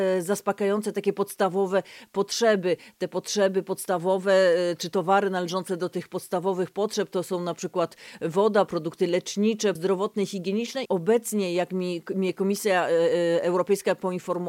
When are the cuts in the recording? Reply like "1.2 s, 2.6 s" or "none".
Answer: 9.8 s, 10.9 s